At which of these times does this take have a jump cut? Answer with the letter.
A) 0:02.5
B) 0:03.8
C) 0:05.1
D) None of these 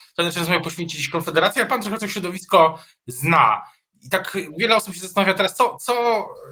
D